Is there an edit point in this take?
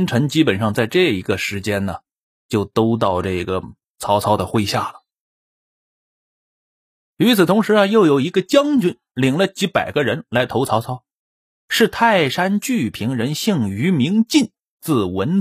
no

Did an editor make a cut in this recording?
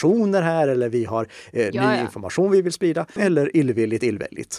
yes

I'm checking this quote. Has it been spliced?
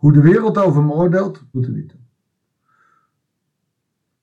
yes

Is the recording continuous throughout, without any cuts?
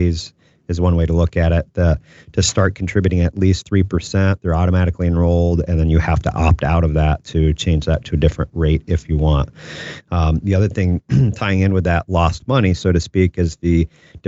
yes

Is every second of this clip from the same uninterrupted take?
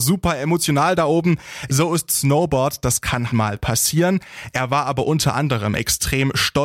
no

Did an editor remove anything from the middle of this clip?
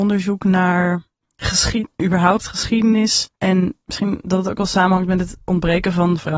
no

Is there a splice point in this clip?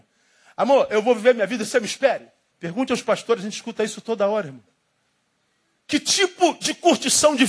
yes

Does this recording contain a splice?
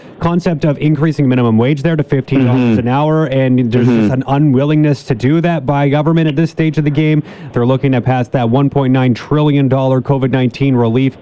yes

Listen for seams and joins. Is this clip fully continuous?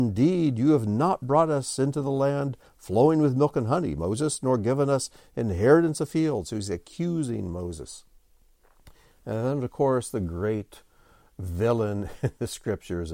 yes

